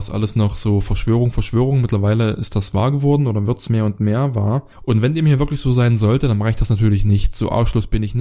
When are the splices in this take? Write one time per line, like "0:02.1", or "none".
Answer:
0:04.7